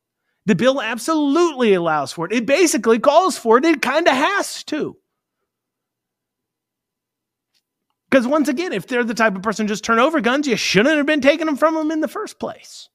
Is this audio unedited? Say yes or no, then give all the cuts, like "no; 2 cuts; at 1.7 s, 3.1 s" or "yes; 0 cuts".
yes; 0 cuts